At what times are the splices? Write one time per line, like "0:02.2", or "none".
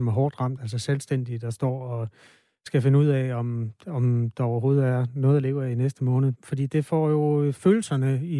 0:06.4